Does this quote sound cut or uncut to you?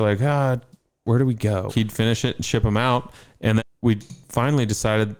cut